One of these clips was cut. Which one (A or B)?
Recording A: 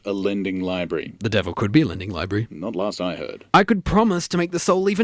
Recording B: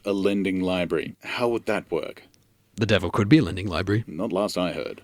B